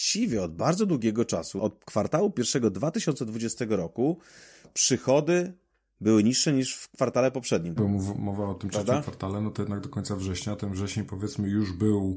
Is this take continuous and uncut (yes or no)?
no